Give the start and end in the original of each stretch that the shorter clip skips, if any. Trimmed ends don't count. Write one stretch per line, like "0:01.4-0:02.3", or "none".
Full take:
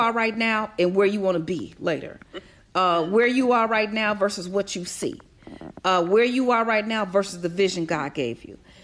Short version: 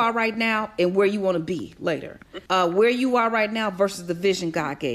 0:02.5-0:05.8